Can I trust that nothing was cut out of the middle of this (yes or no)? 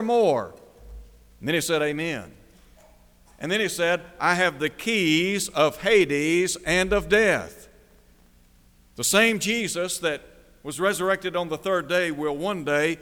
yes